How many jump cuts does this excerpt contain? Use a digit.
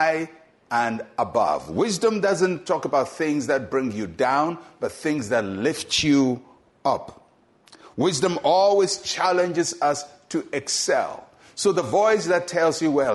0